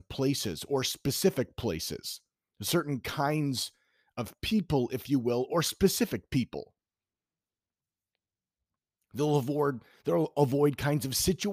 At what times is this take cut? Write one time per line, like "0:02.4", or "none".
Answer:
none